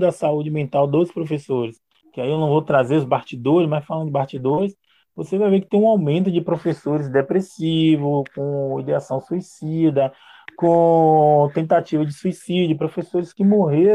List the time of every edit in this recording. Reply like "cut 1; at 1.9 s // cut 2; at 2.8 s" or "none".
cut 1; at 2.0 s